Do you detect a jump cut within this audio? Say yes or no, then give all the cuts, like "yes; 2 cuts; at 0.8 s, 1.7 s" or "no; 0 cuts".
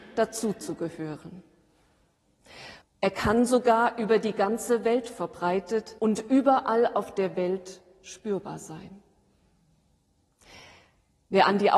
yes; 2 cuts; at 2.8 s, 6.0 s